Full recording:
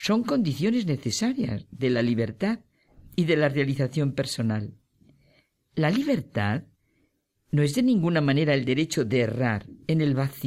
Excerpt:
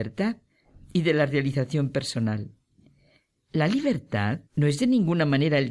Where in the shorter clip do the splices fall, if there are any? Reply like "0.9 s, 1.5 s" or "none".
4.5 s

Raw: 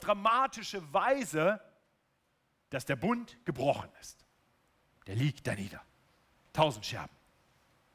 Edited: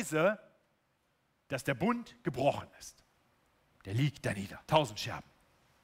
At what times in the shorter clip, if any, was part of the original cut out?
4.6 s

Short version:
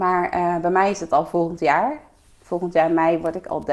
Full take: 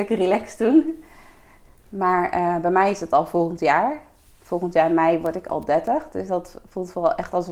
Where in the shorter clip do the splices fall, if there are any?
none

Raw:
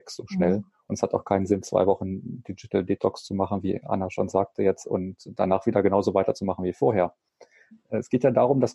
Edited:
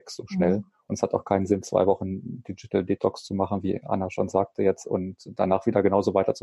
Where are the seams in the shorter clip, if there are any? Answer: none

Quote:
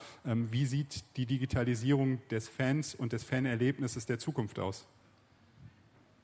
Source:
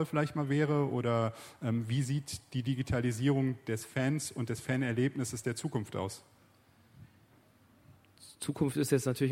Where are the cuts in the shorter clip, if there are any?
none

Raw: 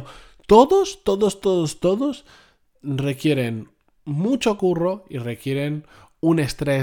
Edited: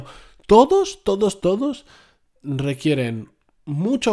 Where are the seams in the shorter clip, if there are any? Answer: 1.4 s

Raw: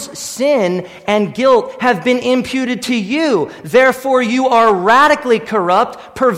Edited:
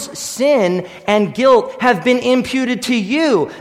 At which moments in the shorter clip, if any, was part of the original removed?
none

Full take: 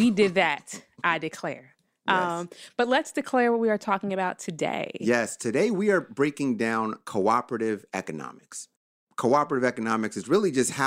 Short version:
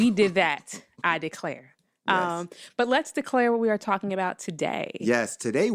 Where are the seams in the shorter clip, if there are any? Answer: none

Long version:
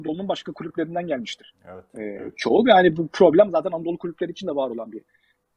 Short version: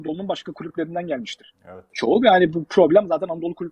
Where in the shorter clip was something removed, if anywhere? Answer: 1.9 s

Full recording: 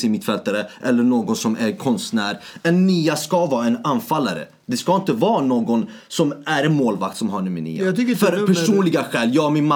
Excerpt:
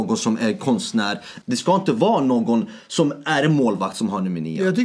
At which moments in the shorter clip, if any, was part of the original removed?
1.4 s

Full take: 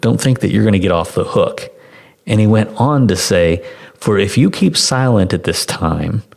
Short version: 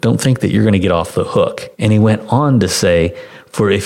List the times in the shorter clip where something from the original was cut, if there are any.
1.7 s

